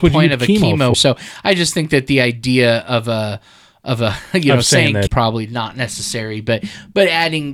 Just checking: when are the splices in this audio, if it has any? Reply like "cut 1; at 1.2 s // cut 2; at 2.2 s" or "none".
cut 1; at 0.9 s // cut 2; at 5.1 s